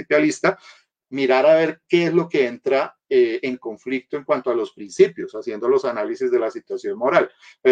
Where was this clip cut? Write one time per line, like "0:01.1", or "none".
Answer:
0:00.9